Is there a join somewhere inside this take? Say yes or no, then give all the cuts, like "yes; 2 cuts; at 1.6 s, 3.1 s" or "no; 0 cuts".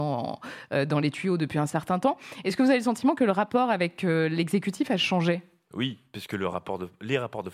no; 0 cuts